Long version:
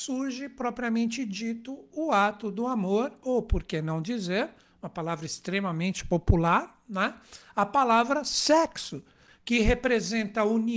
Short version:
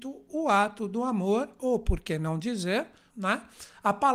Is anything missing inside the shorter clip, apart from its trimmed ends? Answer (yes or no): yes